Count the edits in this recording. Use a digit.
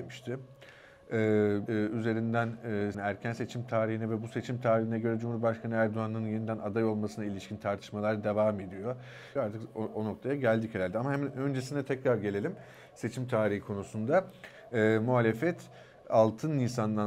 3